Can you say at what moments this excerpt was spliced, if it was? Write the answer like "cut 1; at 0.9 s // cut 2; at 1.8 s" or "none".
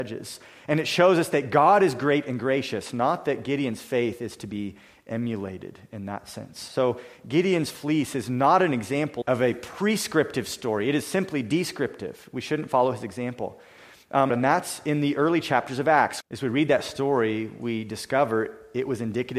cut 1; at 9.2 s // cut 2; at 14.3 s // cut 3; at 16.2 s

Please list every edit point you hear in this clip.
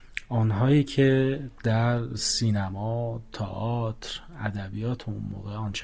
none

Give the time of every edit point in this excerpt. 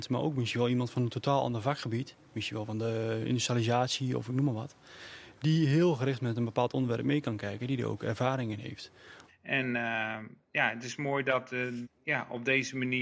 cut 1; at 9.3 s // cut 2; at 11.8 s

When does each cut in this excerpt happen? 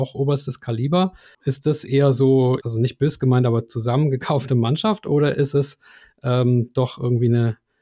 cut 1; at 2.6 s

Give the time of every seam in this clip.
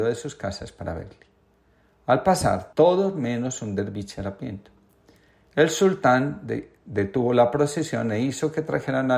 cut 1; at 2.7 s

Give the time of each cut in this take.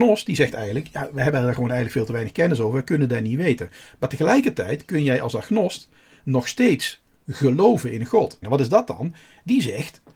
cut 1; at 8.4 s

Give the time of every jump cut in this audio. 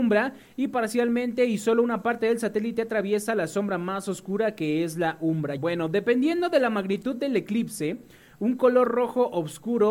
cut 1; at 5.6 s

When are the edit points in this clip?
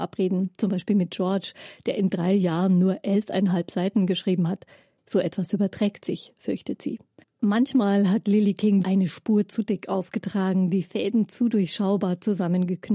cut 1; at 7.2 s // cut 2; at 8.8 s

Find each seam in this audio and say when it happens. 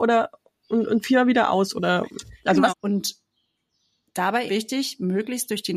cut 1; at 2.7 s // cut 2; at 4.5 s

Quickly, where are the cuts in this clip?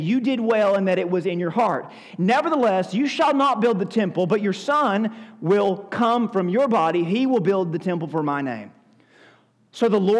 none

